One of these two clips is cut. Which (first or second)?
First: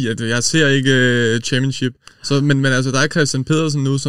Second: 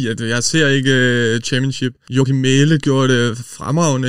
second